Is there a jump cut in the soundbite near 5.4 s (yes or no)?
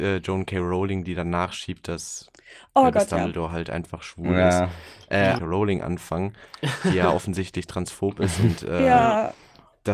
yes